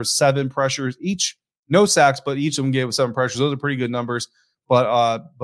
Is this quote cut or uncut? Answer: uncut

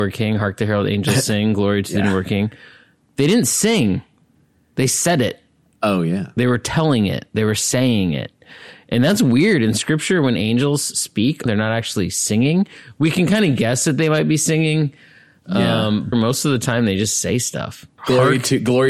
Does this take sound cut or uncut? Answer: cut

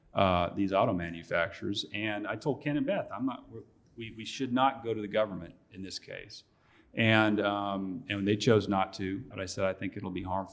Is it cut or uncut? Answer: cut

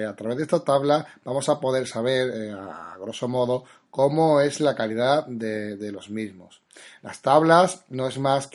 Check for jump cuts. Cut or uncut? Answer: cut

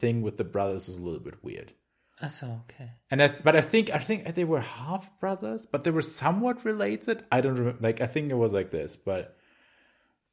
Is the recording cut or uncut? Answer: uncut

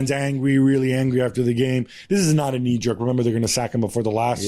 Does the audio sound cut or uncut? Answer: uncut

